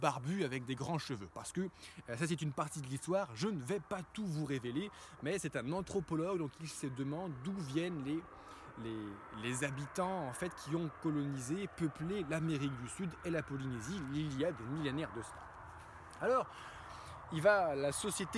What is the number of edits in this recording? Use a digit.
0